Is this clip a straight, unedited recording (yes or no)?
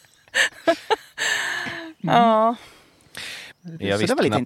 no